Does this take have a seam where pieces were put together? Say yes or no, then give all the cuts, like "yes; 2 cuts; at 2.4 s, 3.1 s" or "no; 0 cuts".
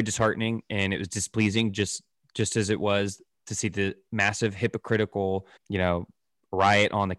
yes; 1 cut; at 5.6 s